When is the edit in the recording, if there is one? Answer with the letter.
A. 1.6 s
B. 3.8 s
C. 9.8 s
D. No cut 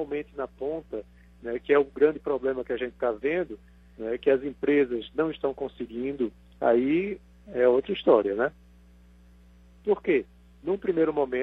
C